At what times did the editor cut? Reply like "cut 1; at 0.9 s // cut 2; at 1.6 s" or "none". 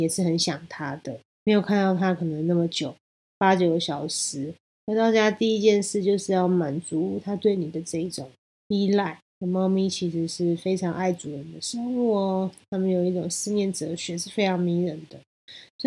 cut 1; at 9.3 s